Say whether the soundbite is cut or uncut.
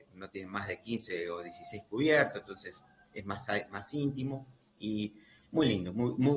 uncut